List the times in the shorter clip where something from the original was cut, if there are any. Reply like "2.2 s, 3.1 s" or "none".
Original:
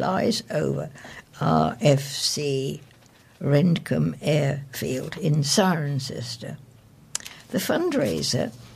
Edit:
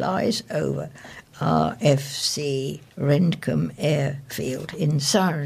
2.9 s